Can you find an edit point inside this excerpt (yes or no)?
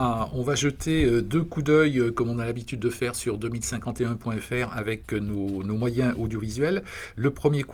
no